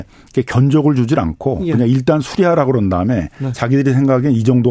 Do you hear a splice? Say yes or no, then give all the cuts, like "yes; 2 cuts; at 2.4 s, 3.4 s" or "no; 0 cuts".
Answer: no; 0 cuts